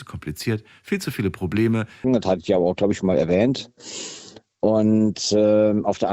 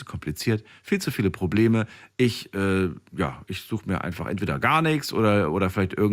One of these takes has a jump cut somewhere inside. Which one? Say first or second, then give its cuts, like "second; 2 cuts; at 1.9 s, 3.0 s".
first; 1 cut; at 2.0 s